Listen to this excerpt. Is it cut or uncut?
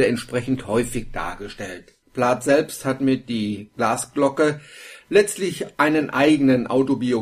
cut